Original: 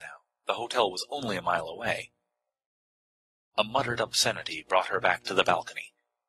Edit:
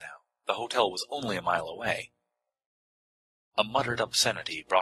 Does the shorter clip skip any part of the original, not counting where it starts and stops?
no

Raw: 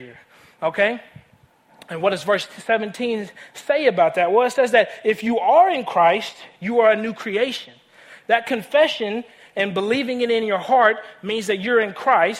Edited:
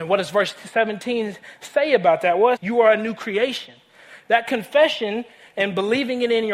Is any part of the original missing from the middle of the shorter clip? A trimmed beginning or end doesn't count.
yes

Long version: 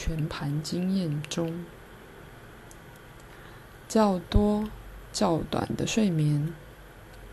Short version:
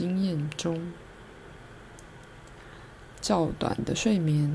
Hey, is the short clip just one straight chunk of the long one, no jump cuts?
no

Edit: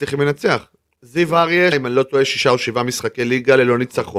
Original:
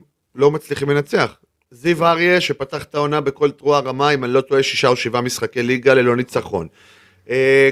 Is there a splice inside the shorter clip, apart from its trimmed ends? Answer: yes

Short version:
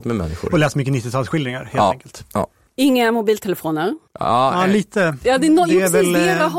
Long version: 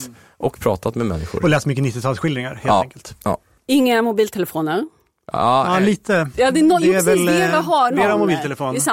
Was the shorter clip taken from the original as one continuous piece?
no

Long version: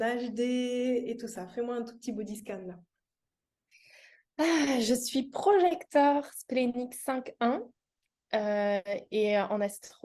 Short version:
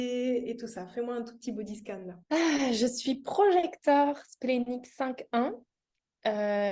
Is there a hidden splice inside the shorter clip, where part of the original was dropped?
yes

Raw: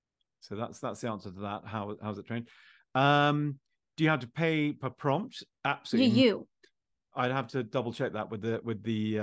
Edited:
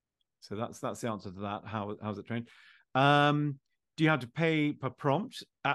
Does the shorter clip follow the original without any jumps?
yes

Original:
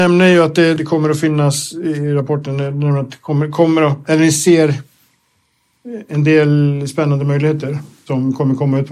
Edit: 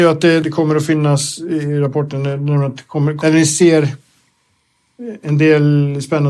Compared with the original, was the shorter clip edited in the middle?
yes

